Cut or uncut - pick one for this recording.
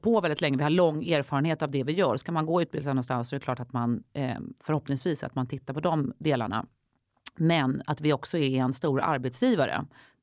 uncut